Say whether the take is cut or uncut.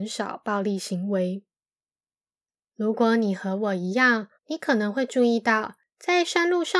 cut